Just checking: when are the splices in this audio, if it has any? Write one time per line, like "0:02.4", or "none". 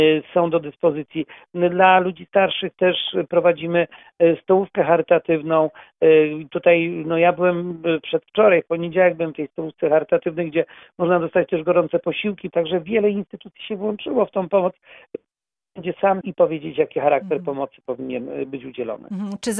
0:12.5
0:16.2